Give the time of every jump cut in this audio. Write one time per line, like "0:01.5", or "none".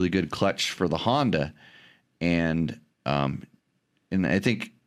none